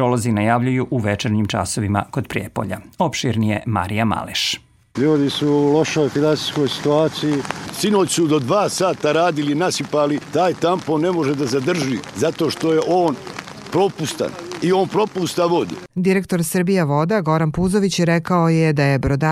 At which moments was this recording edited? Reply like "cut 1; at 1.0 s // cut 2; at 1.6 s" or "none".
cut 1; at 4.9 s